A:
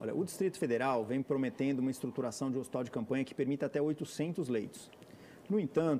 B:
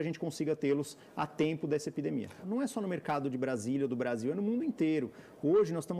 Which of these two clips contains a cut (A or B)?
B